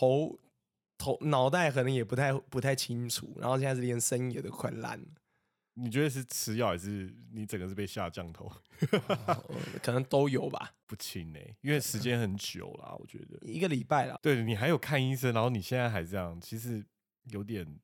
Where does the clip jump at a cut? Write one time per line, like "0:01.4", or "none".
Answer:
0:10.8
0:14.2